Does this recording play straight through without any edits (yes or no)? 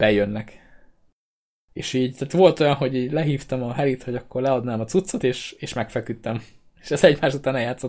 yes